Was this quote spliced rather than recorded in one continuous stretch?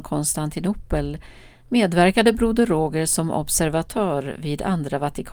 no; 0 cuts

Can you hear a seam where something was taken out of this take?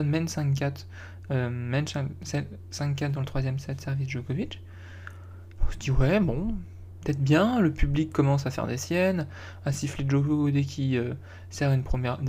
no; 0 cuts

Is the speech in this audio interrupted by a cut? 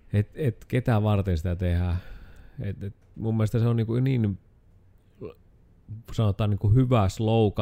no; 0 cuts

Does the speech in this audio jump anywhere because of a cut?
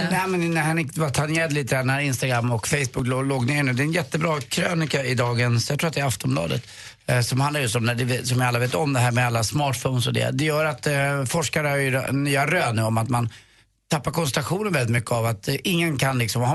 no; 0 cuts

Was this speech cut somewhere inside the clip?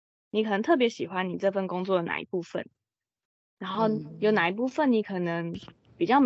no; 0 cuts

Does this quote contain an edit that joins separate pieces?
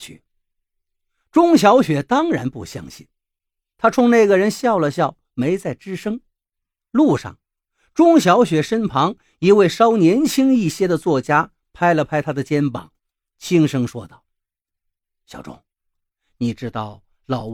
yes; 1 cut; at 6.8 s

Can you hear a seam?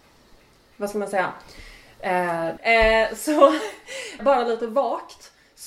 yes; 2 cuts; at 2.6 s, 4.2 s

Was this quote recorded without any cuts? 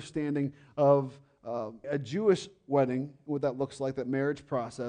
no; 1 cut; at 1.8 s

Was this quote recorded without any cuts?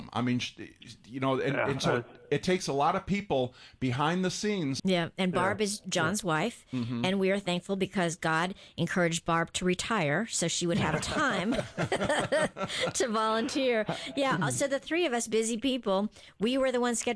no; 1 cut; at 4.8 s

